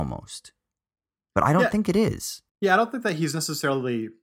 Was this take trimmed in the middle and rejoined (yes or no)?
yes